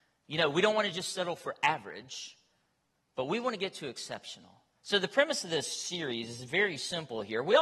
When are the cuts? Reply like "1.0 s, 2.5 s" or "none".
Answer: none